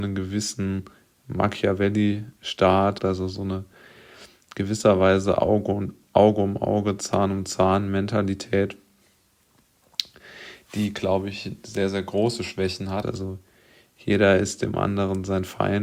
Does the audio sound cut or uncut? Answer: cut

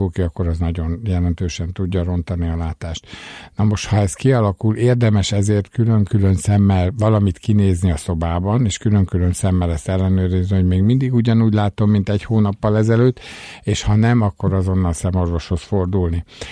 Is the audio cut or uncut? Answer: uncut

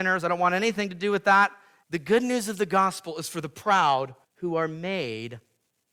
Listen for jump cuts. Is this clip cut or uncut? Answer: cut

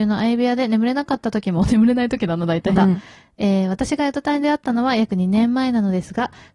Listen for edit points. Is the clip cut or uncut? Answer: cut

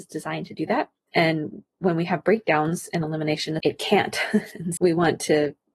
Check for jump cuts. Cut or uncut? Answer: cut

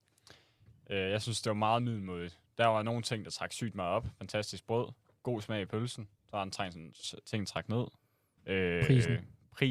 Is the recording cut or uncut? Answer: cut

